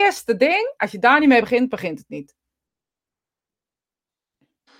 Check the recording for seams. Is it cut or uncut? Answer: uncut